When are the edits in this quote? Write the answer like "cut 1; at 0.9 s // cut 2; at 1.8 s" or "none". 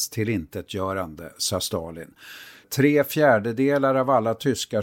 cut 1; at 2.6 s

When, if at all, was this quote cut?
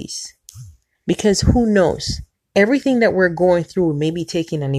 cut 1; at 0.9 s // cut 2; at 2.3 s

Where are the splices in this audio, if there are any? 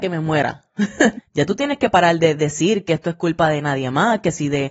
cut 1; at 1.2 s

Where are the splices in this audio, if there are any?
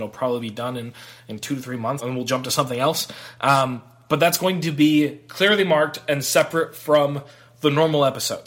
cut 1; at 2.0 s

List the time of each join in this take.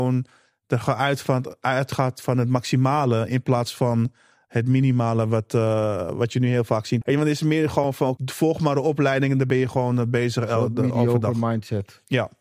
cut 1; at 7.0 s // cut 2; at 8.2 s

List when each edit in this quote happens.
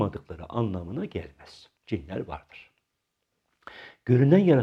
cut 1; at 1.8 s

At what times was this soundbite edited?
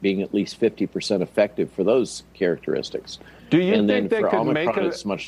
none

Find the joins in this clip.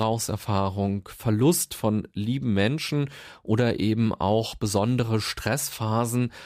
none

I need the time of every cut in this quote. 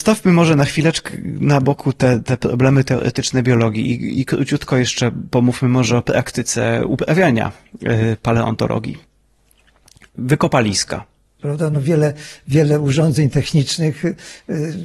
cut 1; at 11.4 s

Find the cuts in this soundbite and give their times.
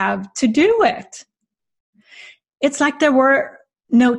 none

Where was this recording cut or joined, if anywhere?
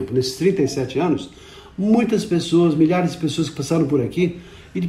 none

